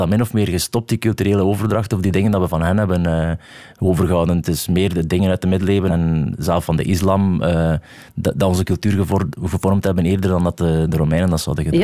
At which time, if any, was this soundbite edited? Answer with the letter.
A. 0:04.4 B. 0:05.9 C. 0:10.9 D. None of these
B